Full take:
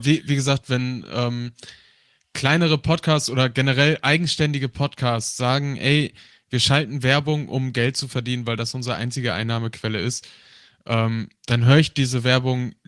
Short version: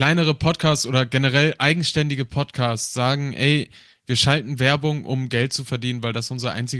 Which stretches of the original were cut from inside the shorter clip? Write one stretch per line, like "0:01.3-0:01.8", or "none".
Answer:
none